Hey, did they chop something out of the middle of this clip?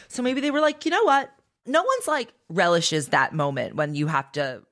no; 0 cuts

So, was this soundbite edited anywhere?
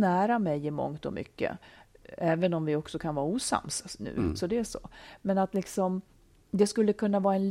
no; 0 cuts

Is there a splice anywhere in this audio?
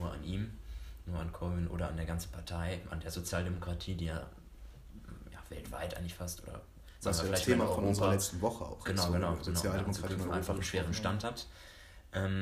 no; 0 cuts

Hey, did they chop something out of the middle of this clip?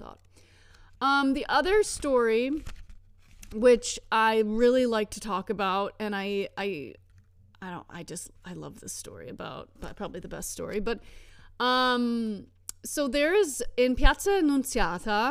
yes; 1 cut; at 9.8 s

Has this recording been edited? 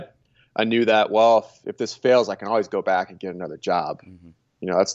no; 0 cuts

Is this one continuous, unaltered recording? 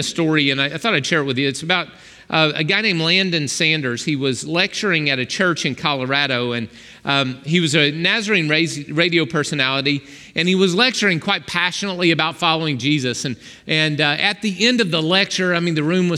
yes; 0 cuts

